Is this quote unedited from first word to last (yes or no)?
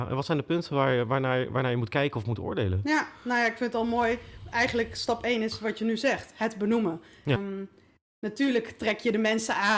no